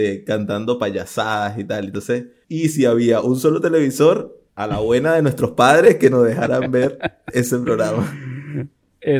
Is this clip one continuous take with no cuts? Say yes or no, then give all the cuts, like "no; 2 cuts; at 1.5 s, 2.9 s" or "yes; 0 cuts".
no; 2 cuts; at 2.4 s, 4.5 s